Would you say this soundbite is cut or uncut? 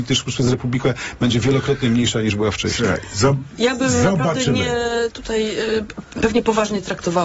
uncut